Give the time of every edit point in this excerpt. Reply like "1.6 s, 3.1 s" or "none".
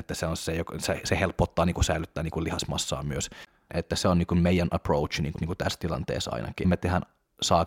3.7 s, 5.4 s, 6.6 s